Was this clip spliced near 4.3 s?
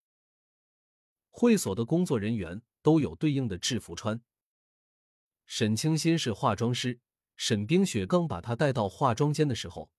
no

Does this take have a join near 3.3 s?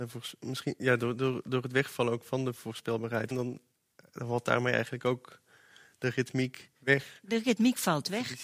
yes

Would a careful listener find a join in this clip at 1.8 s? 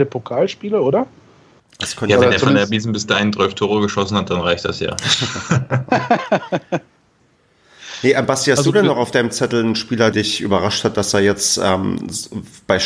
no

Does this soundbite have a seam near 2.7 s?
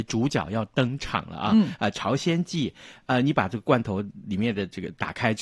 no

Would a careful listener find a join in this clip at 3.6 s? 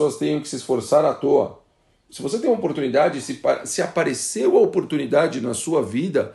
no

